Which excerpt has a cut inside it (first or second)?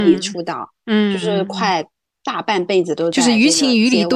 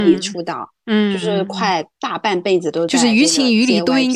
second